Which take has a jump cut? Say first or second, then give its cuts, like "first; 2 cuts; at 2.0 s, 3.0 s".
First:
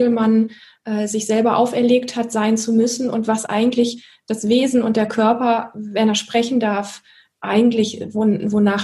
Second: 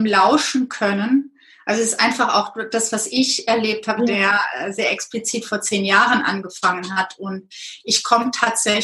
second; 1 cut; at 4.0 s